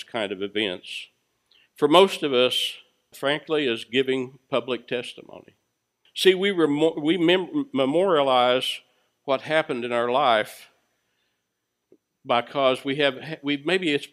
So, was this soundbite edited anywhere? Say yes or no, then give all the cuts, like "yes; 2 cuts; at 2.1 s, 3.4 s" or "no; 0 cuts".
yes; 2 cuts; at 3.1 s, 6.1 s